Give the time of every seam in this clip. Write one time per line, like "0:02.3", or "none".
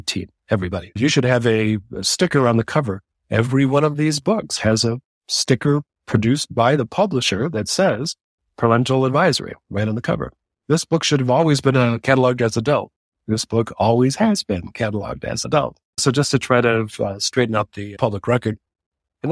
none